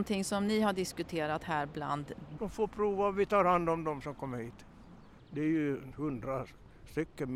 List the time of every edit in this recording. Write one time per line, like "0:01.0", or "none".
0:02.4
0:05.2

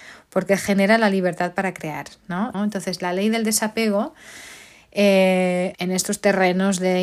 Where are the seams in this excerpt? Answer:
0:02.5
0:05.7

